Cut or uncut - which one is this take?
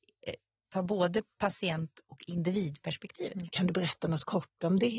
cut